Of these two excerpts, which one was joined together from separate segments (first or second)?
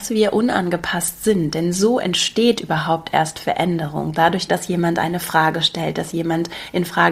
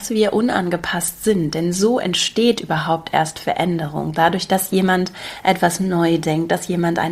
first